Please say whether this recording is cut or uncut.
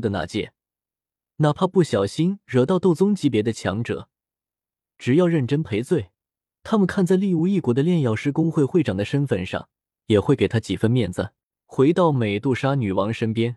cut